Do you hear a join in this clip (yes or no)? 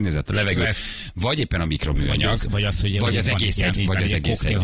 yes